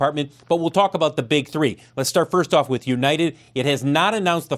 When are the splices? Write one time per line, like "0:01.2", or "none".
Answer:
none